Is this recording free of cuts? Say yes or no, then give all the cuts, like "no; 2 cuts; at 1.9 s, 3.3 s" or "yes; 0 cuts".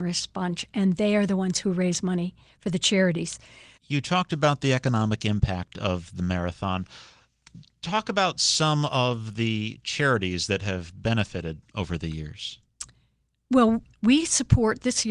no; 1 cut; at 3.8 s